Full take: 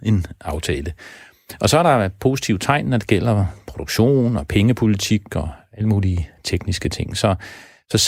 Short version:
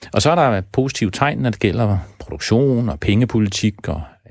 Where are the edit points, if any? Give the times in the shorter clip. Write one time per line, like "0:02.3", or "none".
none